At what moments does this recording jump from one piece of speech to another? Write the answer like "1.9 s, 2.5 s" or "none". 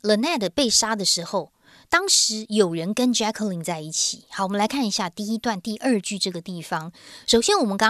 none